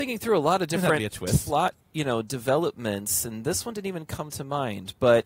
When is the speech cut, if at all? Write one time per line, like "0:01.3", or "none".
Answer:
0:01.8